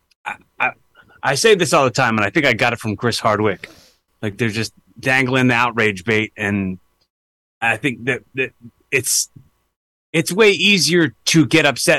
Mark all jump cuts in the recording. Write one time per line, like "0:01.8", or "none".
0:04.1